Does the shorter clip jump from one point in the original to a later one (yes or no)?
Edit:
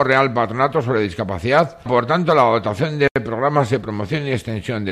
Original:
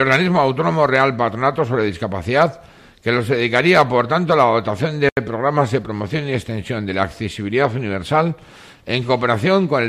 yes